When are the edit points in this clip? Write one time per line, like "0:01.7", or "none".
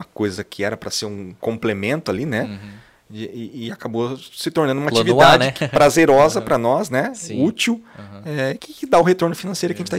0:08.6